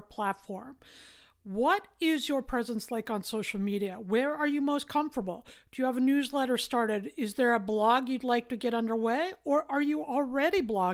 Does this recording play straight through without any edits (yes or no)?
yes